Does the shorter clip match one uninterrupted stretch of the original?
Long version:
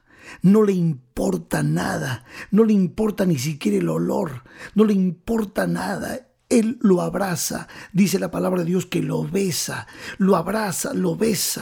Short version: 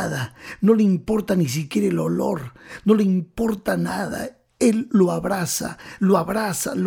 no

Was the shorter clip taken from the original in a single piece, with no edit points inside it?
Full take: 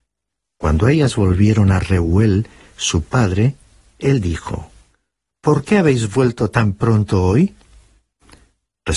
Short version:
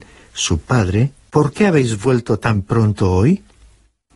no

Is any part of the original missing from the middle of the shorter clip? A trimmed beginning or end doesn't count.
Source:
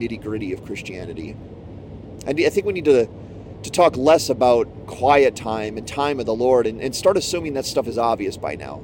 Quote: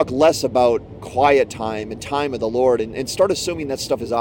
no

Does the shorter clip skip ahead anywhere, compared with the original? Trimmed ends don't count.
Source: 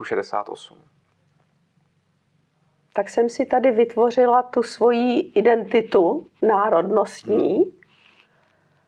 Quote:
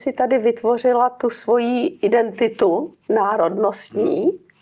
no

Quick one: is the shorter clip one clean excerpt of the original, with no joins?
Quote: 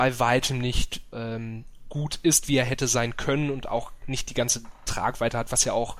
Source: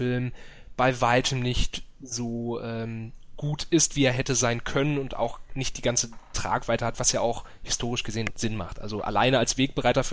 no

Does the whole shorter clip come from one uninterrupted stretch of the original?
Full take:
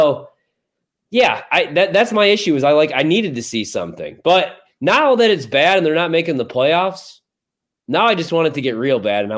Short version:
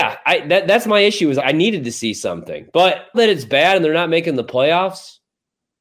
no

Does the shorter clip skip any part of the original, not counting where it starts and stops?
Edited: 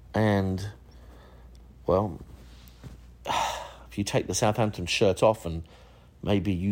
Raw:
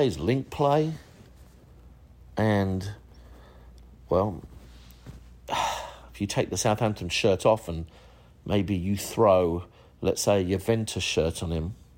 no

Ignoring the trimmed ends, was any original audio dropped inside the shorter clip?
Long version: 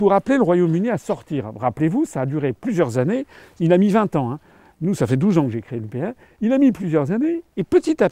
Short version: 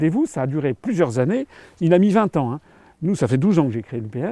no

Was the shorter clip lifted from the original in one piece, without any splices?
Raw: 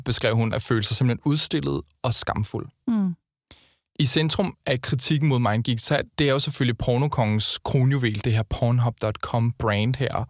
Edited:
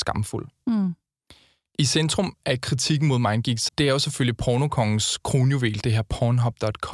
no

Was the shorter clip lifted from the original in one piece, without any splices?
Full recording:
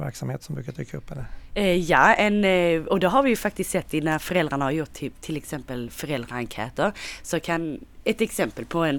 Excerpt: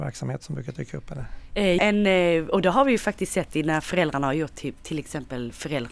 no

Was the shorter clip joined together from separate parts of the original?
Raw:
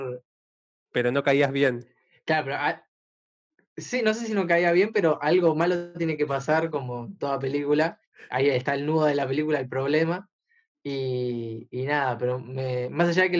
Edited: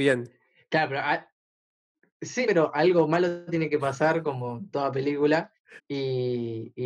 yes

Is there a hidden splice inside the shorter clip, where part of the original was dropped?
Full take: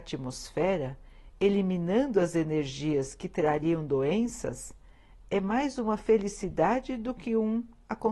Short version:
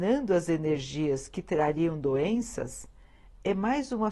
no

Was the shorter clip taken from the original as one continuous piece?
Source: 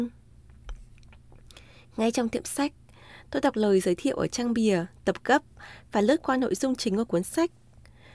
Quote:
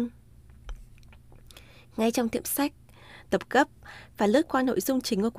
no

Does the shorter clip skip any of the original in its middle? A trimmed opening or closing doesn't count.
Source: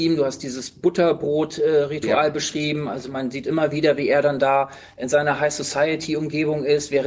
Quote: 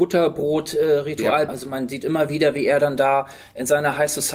yes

